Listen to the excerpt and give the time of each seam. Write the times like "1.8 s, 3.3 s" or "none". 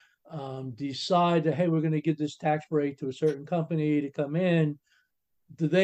none